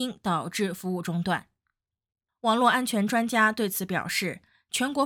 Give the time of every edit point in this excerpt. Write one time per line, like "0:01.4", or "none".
none